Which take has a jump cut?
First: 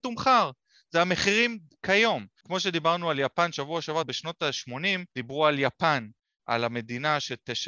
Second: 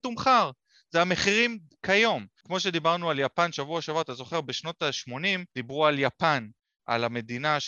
first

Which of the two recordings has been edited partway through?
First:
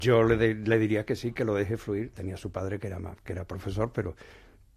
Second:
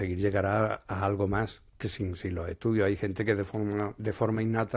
first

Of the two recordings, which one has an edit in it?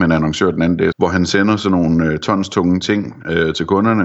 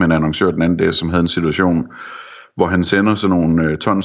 first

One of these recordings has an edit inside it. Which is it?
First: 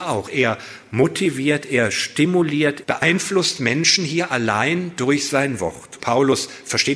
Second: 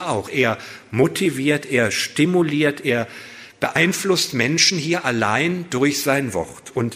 first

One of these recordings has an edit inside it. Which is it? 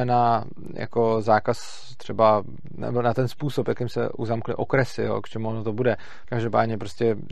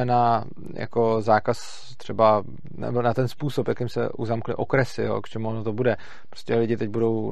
first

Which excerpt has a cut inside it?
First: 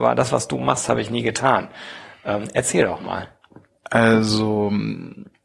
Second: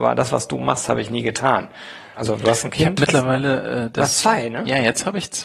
second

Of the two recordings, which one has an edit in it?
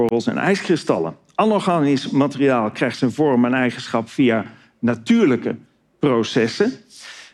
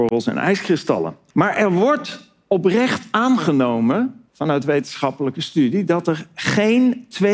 second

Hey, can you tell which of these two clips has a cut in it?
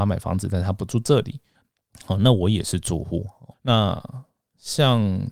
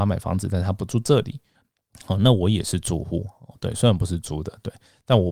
first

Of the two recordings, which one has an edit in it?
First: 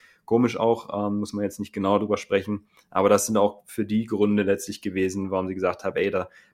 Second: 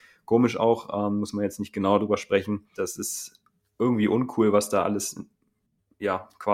second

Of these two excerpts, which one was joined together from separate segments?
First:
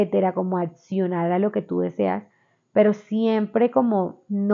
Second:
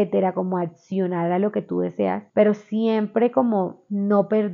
second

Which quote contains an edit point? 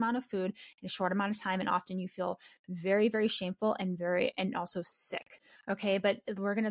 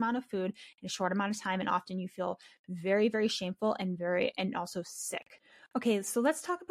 first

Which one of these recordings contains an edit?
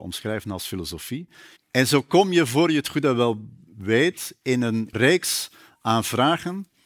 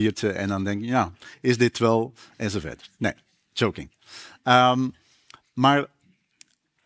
first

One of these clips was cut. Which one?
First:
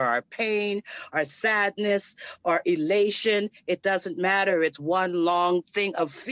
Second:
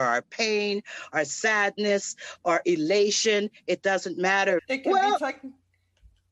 second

